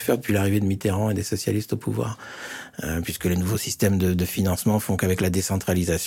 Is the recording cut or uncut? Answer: uncut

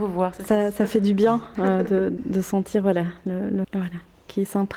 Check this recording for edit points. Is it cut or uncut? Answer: cut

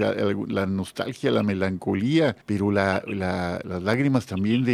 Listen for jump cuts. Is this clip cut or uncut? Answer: cut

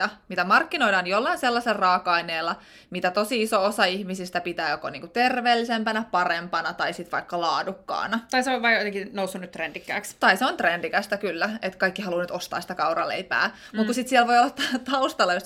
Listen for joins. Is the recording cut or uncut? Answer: uncut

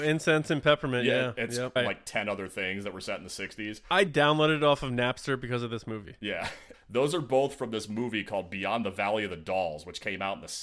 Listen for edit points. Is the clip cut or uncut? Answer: cut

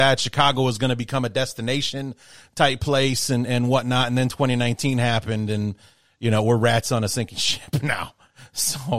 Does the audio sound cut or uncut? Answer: uncut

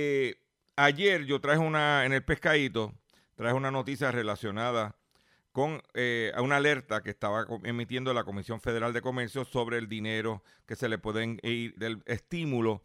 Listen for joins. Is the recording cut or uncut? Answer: cut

